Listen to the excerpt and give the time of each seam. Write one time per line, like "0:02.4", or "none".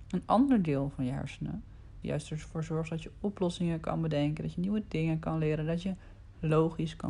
0:02.0